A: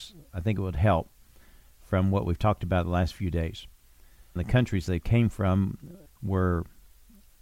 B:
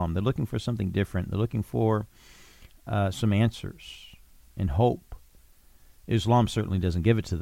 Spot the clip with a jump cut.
A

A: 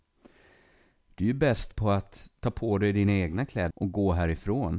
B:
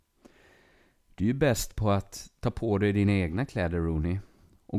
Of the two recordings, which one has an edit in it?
A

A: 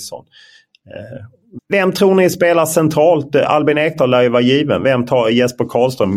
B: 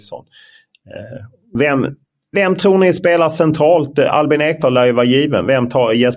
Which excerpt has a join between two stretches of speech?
A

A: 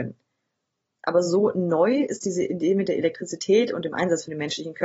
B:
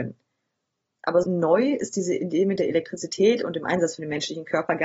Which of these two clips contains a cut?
B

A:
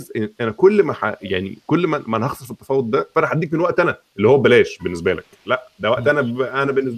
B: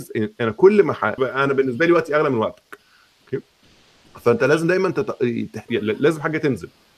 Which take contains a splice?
B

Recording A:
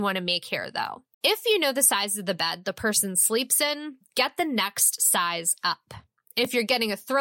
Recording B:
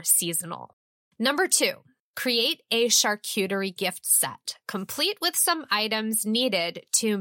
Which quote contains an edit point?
A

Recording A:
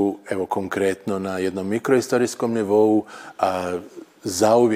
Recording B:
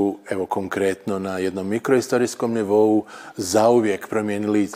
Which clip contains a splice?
B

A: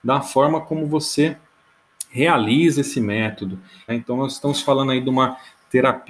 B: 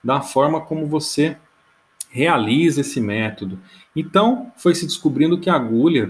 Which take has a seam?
A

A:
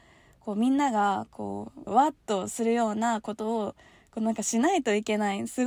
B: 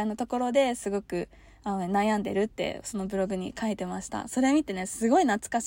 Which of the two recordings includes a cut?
A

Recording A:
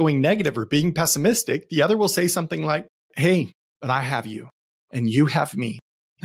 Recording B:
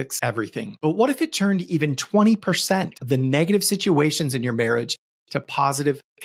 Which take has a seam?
A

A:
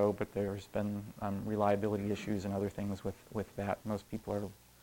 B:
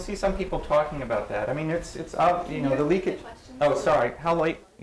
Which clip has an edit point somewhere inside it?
A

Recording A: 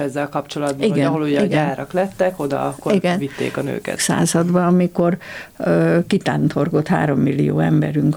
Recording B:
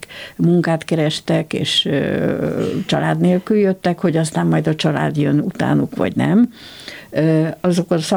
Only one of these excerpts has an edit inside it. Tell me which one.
A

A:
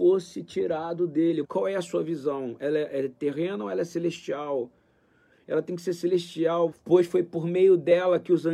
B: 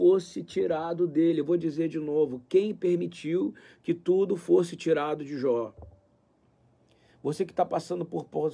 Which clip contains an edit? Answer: A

